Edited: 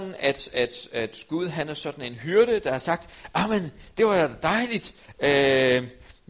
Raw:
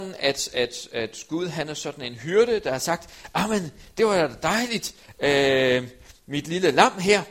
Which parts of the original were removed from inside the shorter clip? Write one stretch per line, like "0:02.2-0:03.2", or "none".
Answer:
none